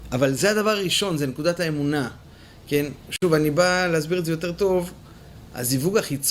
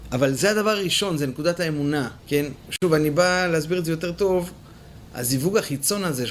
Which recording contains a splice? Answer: second; 1 cut; at 2.2 s

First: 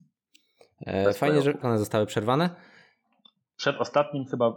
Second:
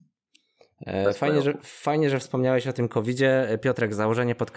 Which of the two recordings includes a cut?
first; 1 cut; at 1.6 s

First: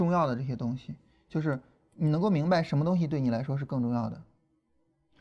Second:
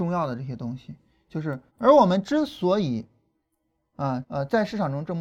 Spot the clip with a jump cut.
second; 2 cuts; at 1.7 s, 4.2 s

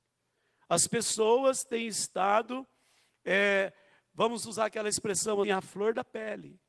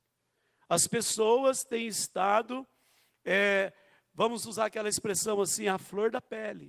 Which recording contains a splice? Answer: first; 1 cut; at 5.4 s

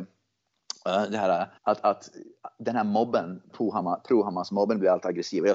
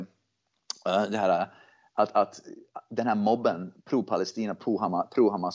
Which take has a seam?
first; 2 cuts; at 1.6 s, 3.5 s

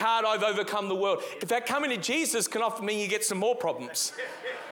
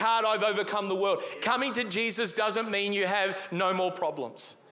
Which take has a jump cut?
first; 1 cut; at 1.4 s

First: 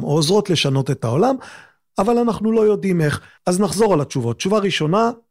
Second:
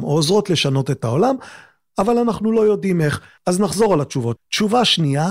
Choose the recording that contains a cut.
second; 1 cut; at 4.4 s

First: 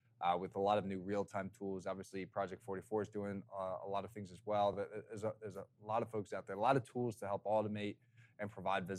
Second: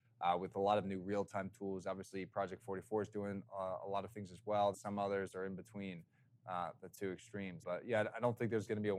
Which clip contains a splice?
second; 2 cuts; at 4.7 s, 7.6 s

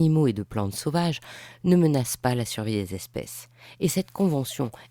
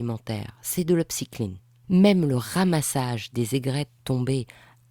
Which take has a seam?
second; 1 cut; at 1.8 s

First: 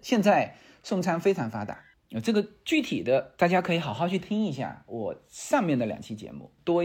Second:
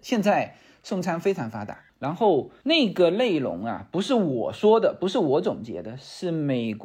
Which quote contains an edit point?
second; 1 cut; at 1.9 s

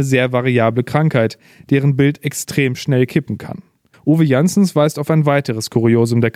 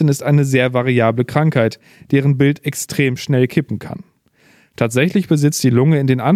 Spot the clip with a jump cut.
first; 1 cut; at 3.9 s

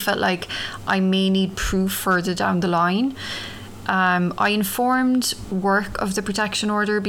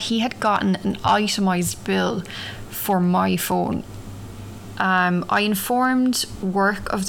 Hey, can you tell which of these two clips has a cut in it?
second; 1 cut; at 4.7 s

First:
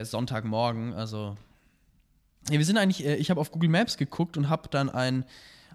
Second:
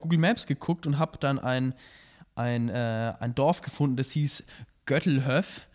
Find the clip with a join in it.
first; 1 cut; at 2.4 s

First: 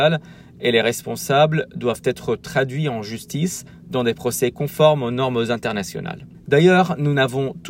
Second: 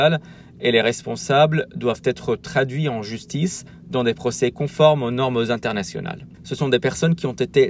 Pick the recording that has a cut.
second; 1 cut; at 6.3 s

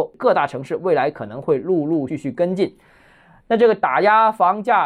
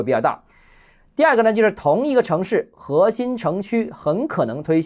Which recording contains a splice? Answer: first; 1 cut; at 2.1 s

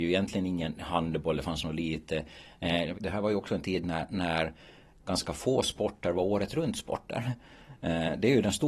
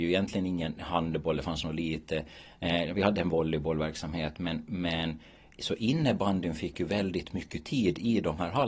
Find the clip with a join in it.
first; 1 cut; at 2.9 s

